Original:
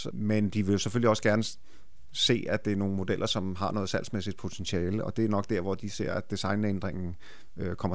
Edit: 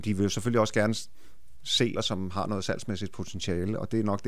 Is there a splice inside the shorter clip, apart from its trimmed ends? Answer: yes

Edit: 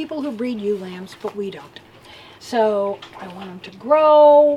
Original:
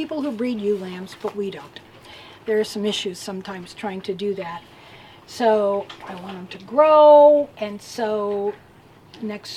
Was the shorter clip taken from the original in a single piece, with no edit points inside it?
no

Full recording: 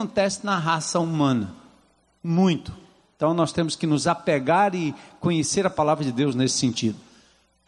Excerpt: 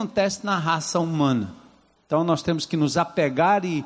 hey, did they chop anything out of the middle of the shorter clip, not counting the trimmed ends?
yes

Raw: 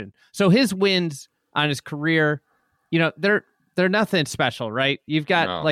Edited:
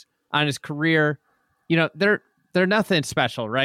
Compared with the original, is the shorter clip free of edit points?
yes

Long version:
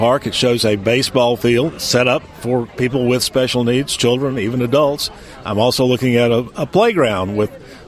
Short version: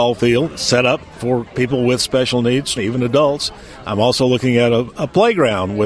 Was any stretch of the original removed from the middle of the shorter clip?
yes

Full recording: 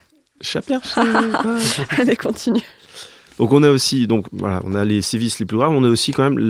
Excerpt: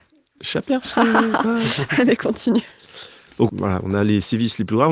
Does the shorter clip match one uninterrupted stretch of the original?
no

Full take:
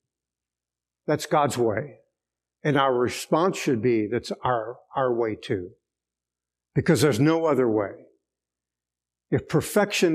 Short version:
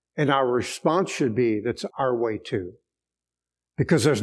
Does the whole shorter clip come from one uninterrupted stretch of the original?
no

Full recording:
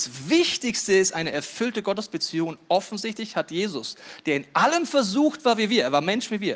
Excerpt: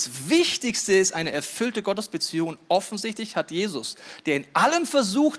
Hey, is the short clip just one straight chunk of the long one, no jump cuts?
yes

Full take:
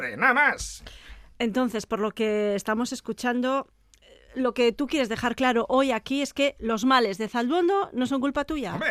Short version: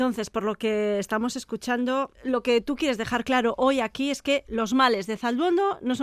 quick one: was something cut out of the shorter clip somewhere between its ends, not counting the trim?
yes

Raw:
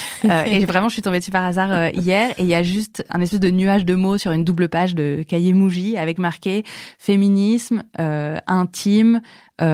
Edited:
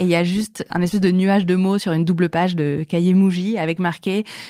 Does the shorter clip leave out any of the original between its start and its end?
no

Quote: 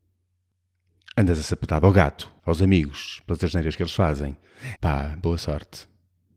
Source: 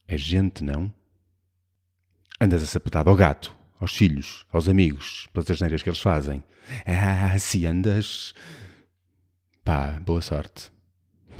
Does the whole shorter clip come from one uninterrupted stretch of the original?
no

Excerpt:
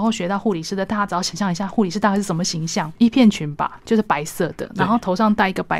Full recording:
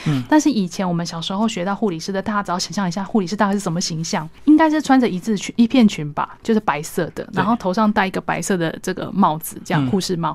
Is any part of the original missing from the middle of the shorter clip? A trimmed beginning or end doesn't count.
yes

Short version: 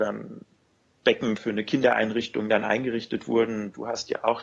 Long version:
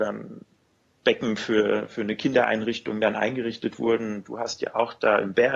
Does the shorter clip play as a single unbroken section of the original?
no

